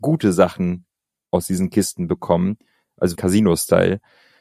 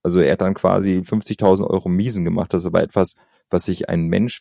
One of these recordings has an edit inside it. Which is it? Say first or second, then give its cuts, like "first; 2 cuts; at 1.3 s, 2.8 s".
first; 1 cut; at 3.1 s